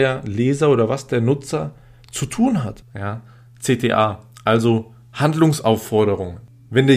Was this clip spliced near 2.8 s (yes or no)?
yes